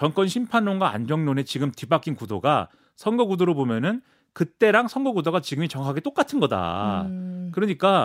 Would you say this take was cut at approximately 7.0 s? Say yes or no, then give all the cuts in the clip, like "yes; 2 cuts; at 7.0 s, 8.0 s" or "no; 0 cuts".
no; 0 cuts